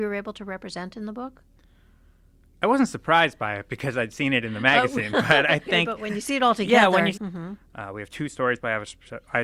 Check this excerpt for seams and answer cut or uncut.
cut